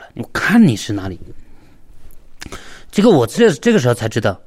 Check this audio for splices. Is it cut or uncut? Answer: uncut